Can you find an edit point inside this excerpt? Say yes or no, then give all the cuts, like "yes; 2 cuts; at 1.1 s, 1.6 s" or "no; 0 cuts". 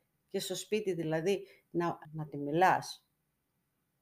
yes; 1 cut; at 2.0 s